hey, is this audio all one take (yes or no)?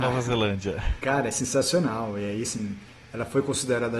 yes